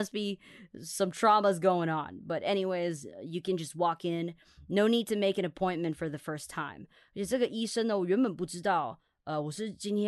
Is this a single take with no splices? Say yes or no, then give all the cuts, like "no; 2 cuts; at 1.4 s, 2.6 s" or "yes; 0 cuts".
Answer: yes; 0 cuts